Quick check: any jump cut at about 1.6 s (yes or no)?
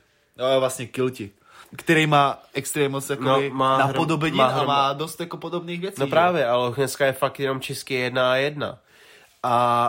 yes